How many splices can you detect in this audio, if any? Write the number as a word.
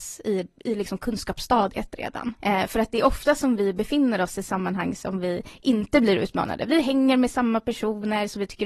one